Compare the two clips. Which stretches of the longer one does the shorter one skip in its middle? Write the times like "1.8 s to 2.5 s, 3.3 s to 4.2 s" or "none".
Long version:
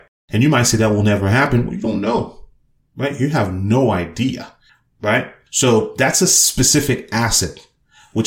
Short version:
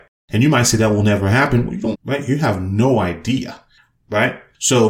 1.9 s to 2.8 s